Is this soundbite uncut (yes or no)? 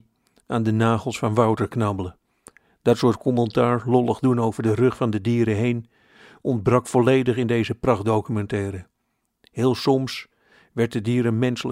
yes